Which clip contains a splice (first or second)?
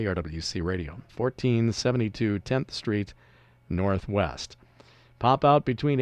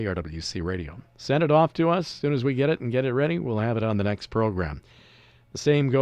first